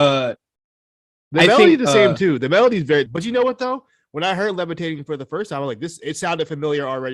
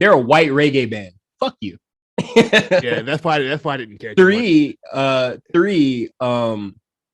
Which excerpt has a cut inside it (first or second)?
first